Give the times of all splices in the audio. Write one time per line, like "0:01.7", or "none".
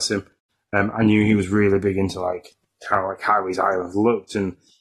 none

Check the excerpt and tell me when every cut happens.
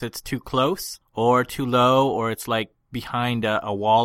none

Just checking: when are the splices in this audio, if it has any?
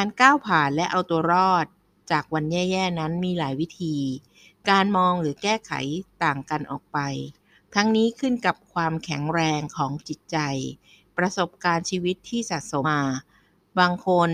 0:12.8

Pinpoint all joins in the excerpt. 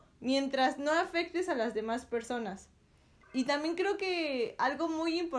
0:03.2

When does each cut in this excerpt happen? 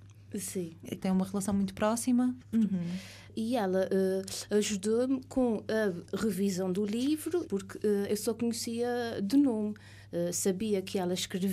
0:01.0
0:02.5
0:07.5

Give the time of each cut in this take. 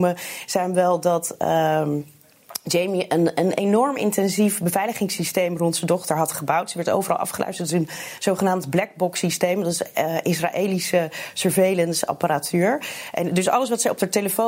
none

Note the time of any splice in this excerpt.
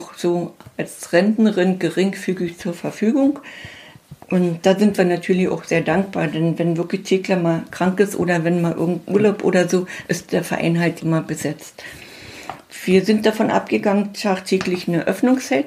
0:04.2
0:11.0

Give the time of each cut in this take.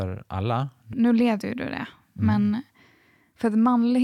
0:00.9

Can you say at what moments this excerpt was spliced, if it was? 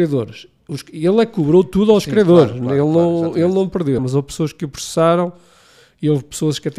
0:04.0

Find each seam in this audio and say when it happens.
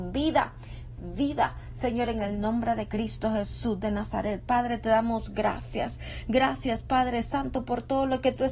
none

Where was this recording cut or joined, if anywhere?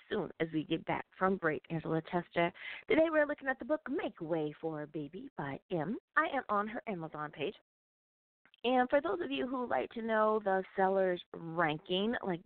0:01.7
0:06.1

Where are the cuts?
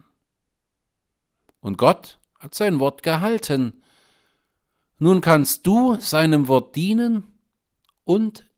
none

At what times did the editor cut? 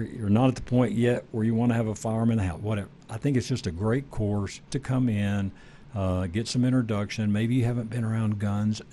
0:04.7

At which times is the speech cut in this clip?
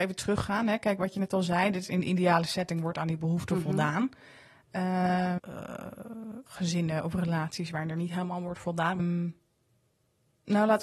0:05.4
0:06.5
0:09.0

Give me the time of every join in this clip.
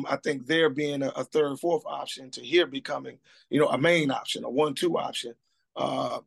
none

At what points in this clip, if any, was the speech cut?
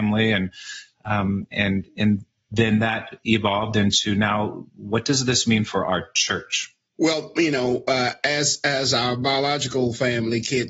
none

